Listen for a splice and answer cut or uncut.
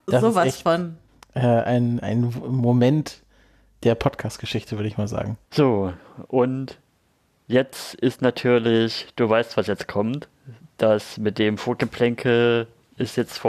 cut